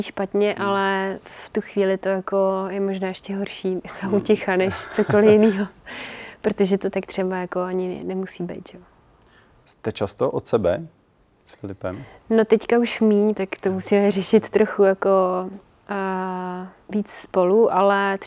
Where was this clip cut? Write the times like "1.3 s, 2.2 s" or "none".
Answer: 13.3 s